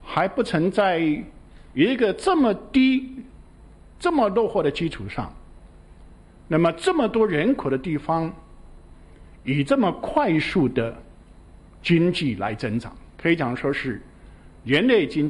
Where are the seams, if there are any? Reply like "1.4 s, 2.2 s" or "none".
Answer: none